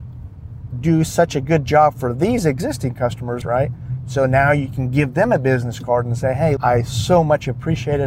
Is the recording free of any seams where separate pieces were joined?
no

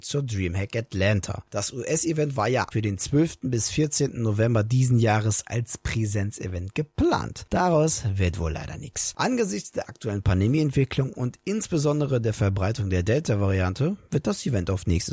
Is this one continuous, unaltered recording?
no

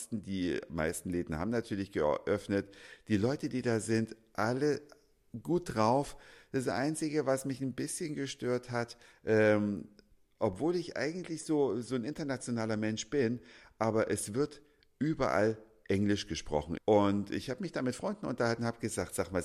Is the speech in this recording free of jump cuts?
no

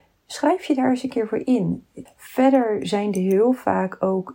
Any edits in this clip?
yes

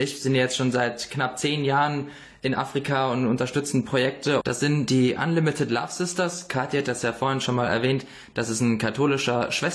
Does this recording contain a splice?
yes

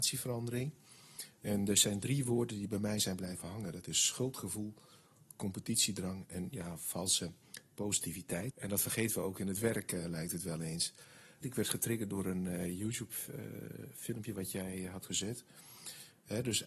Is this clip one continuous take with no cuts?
no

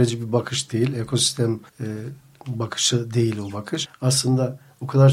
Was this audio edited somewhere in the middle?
yes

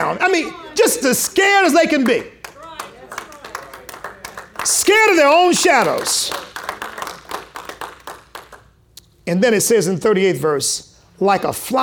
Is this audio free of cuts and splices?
no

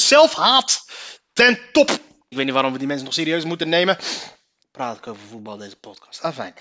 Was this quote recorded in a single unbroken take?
no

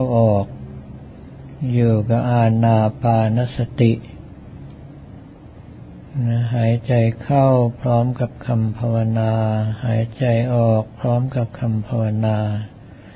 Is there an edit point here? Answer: no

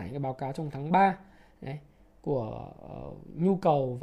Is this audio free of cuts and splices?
yes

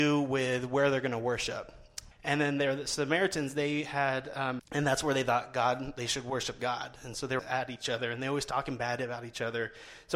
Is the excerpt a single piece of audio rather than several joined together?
no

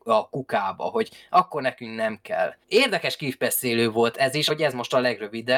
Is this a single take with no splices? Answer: no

